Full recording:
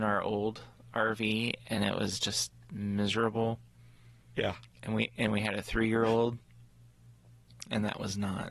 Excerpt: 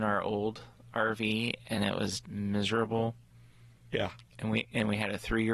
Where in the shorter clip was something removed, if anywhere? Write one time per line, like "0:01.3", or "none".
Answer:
0:02.2